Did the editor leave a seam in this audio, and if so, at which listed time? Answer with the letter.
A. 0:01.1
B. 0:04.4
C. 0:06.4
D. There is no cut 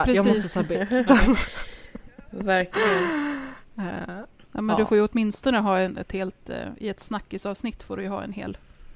A